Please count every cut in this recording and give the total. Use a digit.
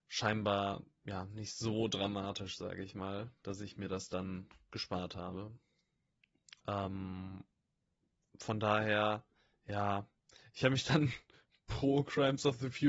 1